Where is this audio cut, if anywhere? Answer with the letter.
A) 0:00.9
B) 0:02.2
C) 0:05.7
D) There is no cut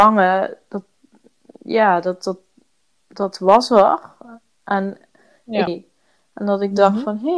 C